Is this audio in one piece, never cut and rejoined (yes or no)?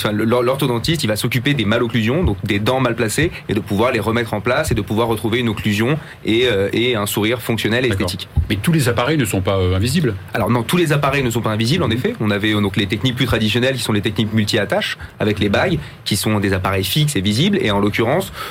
yes